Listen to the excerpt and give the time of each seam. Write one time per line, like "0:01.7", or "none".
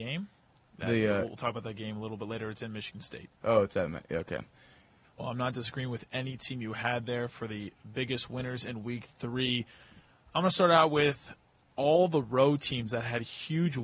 0:05.0